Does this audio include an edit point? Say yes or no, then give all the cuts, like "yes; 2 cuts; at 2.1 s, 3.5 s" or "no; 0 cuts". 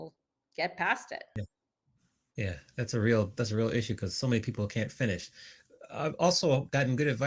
no; 0 cuts